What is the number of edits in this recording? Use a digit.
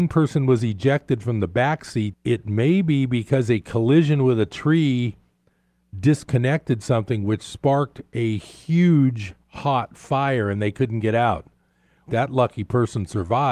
2